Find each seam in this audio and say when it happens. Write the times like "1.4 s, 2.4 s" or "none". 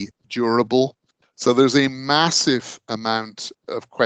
1.2 s